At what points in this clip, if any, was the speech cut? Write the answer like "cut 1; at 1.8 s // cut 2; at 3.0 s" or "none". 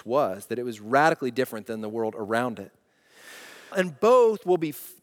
cut 1; at 3.7 s